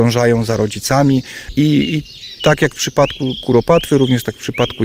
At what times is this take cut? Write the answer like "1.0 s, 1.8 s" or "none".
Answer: none